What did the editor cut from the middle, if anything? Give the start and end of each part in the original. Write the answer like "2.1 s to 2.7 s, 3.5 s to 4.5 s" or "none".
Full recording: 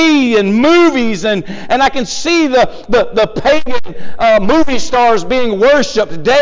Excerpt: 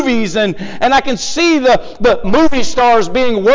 3.1 s to 4.4 s